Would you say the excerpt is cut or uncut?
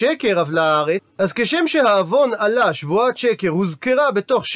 cut